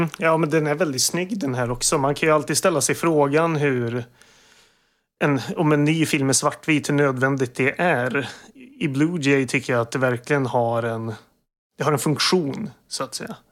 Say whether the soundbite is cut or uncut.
uncut